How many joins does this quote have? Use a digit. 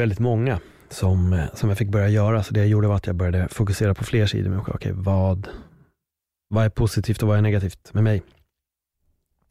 1